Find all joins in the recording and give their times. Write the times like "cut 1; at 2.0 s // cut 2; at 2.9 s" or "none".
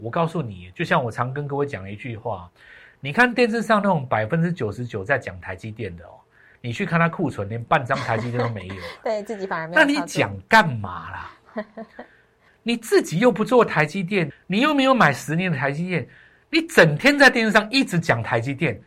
cut 1; at 12.5 s // cut 2; at 14.3 s